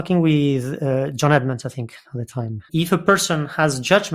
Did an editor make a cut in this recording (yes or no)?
yes